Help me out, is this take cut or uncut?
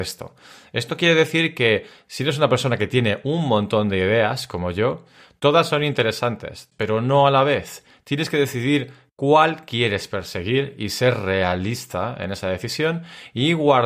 cut